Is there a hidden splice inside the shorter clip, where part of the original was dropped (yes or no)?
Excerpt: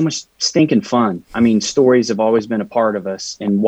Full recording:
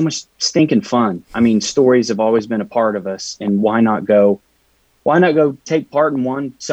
no